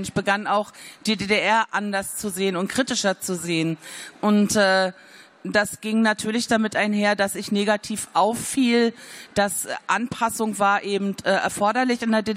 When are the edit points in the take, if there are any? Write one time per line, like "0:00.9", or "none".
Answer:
none

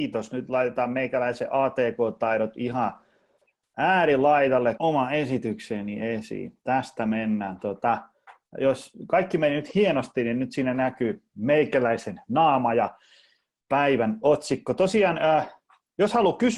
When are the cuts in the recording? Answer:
0:04.8

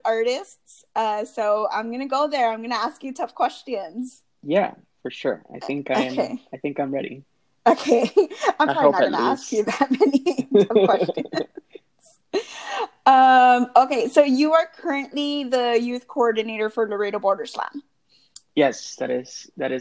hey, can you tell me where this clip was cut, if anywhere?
none

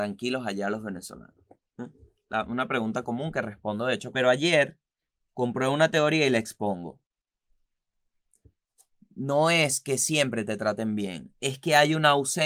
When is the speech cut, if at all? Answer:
0:04.1

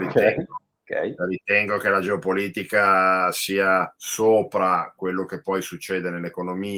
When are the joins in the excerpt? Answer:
0:04.0

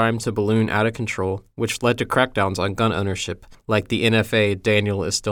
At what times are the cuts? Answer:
none

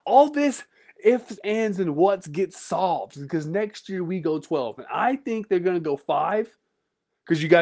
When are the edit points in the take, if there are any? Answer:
none

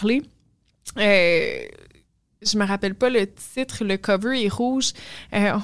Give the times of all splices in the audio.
none

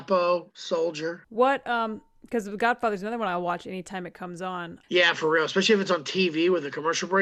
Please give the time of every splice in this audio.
0:01.2
0:04.8

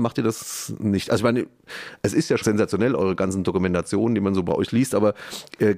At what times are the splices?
0:02.4

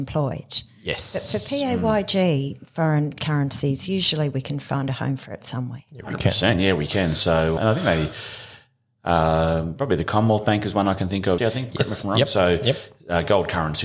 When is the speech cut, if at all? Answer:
0:07.6
0:11.4

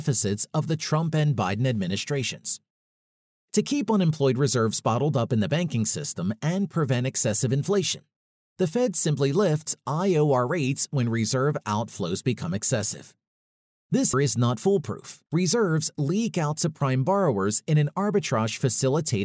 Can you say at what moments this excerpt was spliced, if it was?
0:14.1
0:15.3

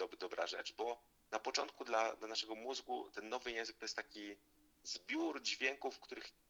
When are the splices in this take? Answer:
none

